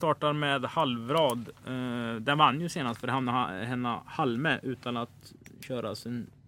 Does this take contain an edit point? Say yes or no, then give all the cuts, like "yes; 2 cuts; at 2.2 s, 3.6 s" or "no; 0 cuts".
no; 0 cuts